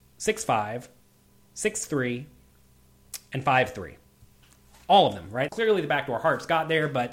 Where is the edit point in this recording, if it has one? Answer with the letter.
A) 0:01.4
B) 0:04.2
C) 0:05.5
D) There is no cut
C